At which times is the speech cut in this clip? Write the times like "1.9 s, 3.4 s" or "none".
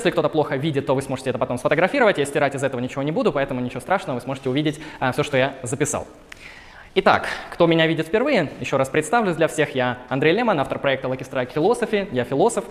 none